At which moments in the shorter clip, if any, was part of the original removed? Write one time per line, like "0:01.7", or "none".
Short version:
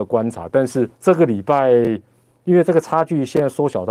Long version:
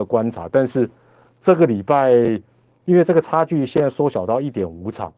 0:00.9